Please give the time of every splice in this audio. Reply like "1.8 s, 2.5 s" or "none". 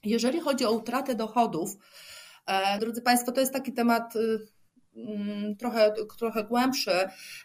2.8 s